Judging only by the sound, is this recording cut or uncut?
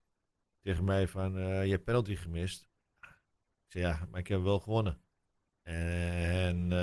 uncut